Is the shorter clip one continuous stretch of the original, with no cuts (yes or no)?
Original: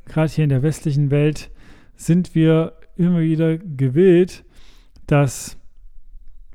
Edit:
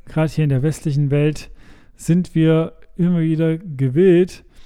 yes